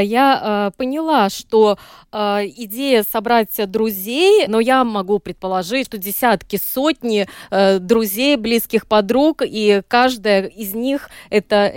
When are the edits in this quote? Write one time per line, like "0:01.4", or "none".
0:04.5
0:05.8